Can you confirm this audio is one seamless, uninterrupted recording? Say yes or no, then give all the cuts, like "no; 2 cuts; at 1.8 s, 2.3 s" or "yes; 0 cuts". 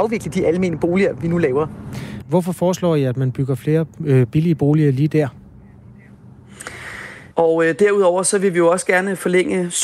no; 2 cuts; at 2.2 s, 7.3 s